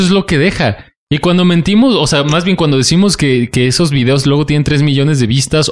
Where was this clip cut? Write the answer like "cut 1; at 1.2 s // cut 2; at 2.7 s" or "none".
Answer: none